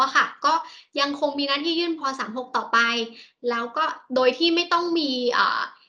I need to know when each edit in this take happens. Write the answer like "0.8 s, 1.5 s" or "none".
2.0 s